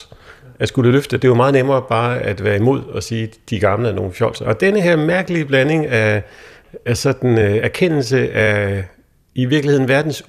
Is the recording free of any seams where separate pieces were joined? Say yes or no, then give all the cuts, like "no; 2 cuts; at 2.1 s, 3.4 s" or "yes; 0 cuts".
no; 1 cut; at 4.4 s